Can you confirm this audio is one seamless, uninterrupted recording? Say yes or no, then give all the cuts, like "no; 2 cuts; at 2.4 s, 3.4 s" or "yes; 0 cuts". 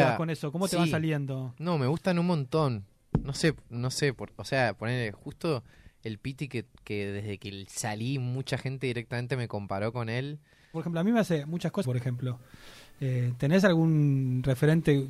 no; 2 cuts; at 10.7 s, 11.8 s